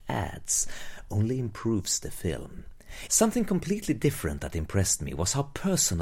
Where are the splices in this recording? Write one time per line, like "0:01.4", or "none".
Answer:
0:03.1